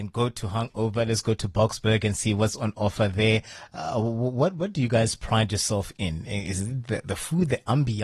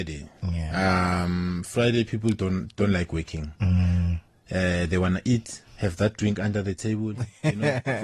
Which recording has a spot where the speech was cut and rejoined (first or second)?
second